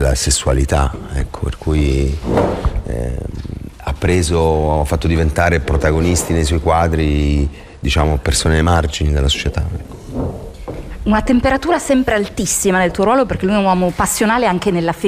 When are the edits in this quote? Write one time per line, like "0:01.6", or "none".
none